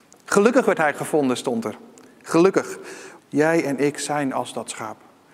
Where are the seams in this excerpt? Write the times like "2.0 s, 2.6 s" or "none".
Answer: 3.2 s